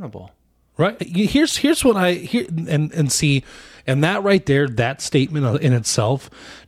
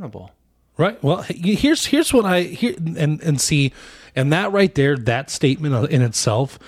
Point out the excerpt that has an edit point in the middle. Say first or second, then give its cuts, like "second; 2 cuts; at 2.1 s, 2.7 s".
first; 1 cut; at 1.0 s